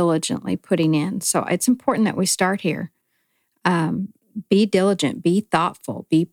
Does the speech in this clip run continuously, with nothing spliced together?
yes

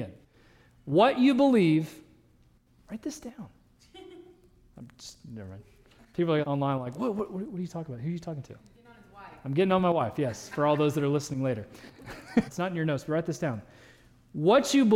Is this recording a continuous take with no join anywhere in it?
no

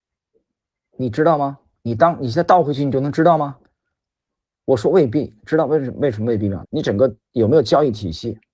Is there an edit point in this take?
yes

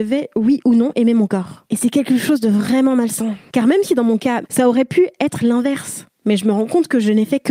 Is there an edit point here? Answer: yes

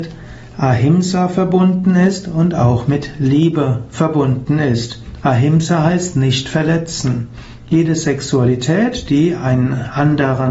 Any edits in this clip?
no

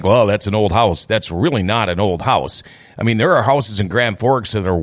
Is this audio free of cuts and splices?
yes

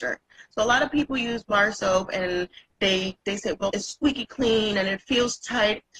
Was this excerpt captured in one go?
no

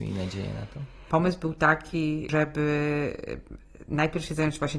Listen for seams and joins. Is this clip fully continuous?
no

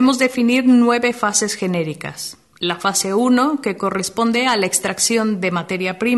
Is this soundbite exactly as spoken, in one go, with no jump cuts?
yes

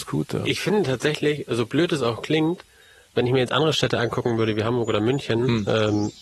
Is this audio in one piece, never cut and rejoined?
yes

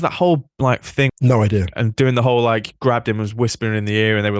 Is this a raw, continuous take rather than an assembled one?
no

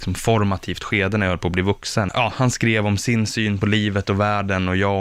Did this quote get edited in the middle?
yes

